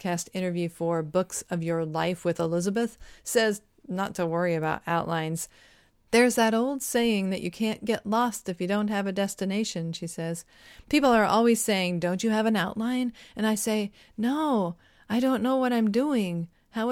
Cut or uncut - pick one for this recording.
uncut